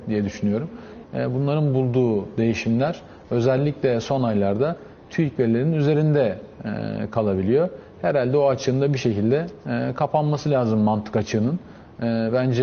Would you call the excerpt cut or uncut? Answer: cut